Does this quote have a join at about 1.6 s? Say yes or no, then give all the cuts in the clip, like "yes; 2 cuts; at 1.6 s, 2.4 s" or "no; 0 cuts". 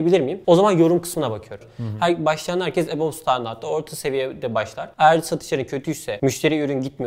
yes; 1 cut; at 1.6 s